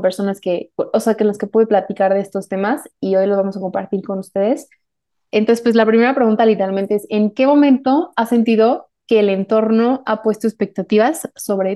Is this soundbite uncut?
yes; 0 cuts

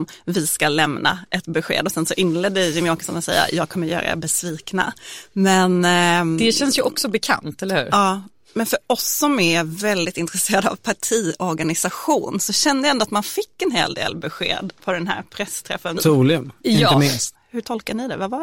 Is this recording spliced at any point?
yes; 2 cuts; at 16.0 s, 17.3 s

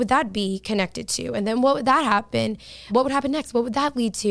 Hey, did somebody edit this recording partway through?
yes; 1 cut; at 2.9 s

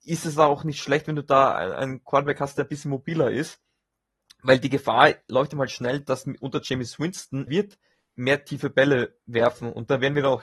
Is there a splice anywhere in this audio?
yes; 1 cut; at 7.5 s

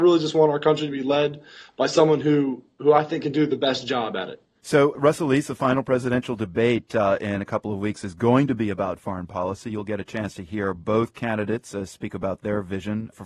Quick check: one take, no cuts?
yes; 0 cuts

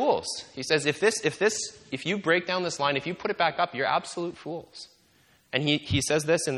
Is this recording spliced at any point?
no; 0 cuts

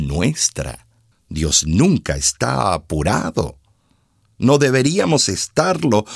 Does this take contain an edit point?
yes; 1 cut; at 1.1 s

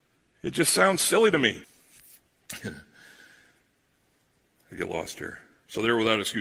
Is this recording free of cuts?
no; 1 cut; at 1.6 s

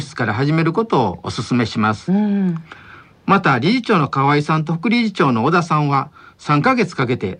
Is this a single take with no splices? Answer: yes; 0 cuts

